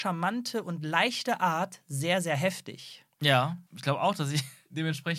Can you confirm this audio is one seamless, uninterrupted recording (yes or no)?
no